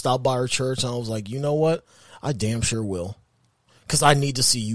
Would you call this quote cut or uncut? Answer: uncut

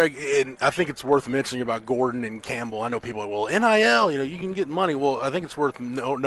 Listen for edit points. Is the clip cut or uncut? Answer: uncut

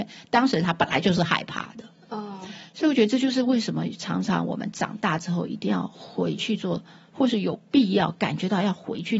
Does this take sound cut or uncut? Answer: uncut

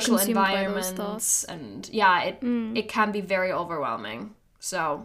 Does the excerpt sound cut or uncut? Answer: uncut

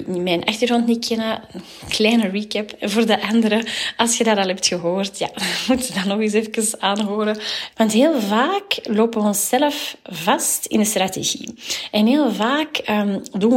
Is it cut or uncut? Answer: cut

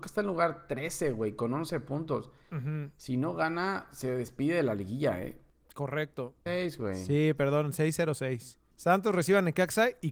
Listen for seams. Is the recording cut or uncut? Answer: cut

